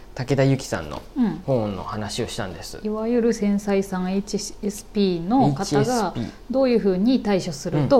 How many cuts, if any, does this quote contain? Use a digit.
1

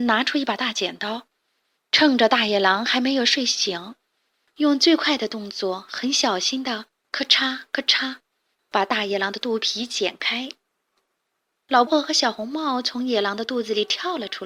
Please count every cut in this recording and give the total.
1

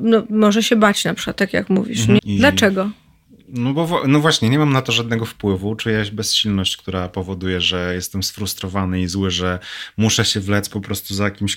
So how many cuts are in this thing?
1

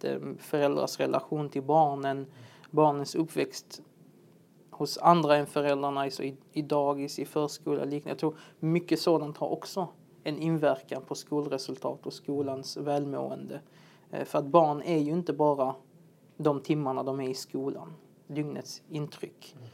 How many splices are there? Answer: 1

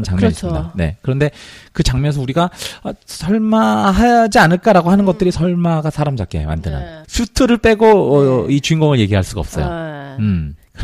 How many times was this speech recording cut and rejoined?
1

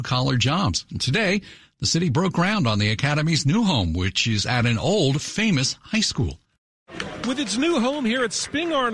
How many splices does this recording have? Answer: 0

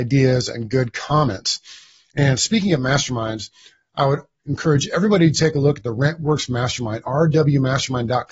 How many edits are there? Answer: 0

